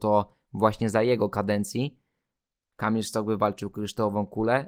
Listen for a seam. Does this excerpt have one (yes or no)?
no